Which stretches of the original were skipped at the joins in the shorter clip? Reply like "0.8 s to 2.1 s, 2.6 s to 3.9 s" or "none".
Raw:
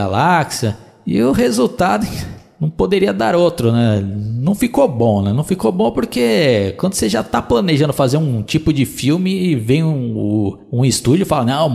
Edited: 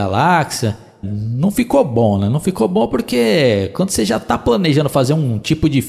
1.0 s to 4.1 s